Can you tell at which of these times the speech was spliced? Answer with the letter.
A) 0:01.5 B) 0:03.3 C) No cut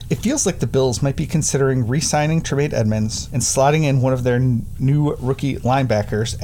B